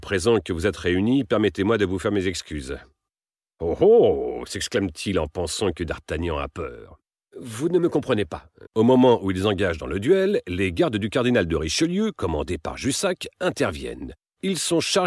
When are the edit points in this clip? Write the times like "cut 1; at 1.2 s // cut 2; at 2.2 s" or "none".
cut 1; at 8.7 s